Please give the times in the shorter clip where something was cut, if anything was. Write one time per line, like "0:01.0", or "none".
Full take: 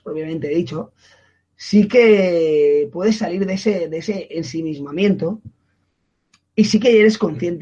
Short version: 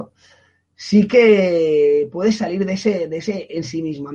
none

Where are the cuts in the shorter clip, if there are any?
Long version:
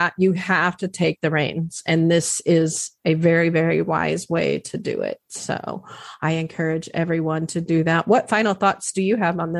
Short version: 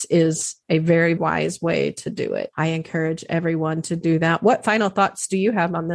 0:01.2
0:02.5

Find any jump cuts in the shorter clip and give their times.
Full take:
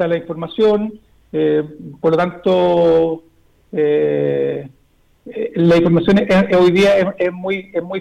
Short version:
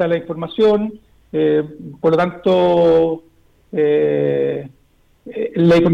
none

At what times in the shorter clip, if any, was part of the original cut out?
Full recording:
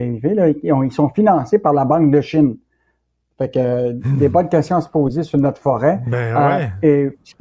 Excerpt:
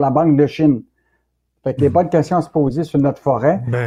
0:01.8

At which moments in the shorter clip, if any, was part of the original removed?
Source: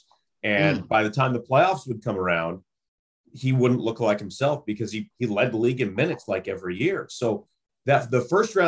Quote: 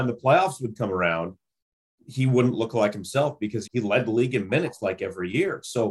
0:03.6

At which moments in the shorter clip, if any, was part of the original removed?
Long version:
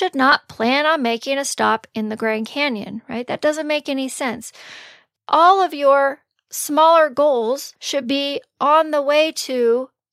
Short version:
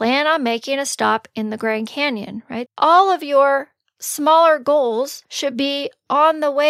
0:02.7

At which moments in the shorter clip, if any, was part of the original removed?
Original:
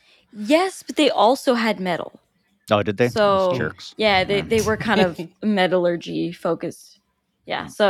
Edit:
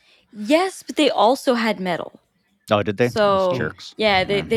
none

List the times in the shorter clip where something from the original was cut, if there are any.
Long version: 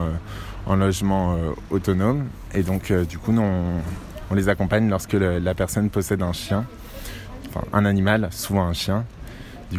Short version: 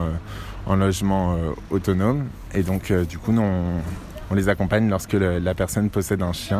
none

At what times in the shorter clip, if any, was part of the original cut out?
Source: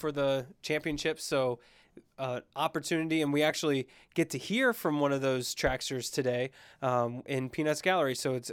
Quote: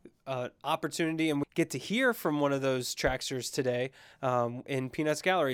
0:01.4

